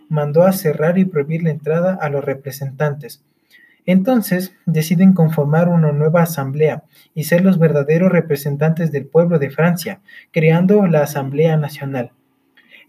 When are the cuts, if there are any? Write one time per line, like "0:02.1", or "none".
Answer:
none